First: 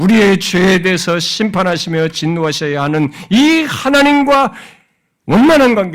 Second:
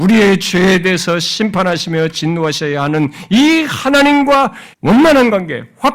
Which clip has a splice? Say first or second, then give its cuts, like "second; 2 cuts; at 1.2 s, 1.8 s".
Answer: second; 1 cut; at 4.7 s